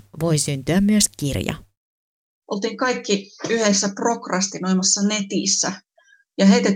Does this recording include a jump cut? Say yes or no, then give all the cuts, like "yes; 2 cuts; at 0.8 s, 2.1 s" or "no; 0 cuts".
no; 0 cuts